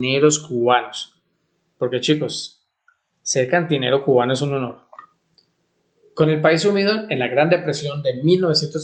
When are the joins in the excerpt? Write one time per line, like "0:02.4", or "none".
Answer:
none